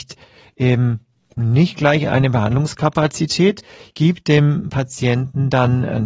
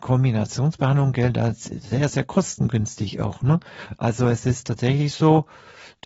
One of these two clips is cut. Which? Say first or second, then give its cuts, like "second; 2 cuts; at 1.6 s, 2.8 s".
second; 1 cut; at 2.1 s